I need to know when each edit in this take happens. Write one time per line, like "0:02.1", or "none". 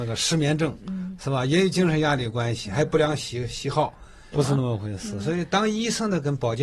0:04.3